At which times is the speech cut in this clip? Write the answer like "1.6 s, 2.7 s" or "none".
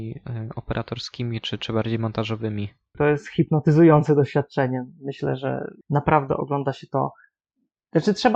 2.9 s, 5.8 s

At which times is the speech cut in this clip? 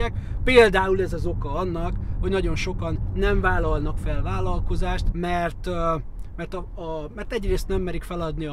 5.1 s

